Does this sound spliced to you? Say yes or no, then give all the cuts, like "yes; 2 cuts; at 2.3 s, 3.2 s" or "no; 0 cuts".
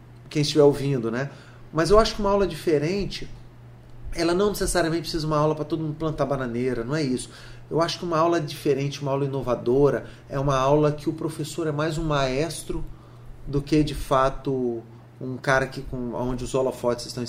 no; 0 cuts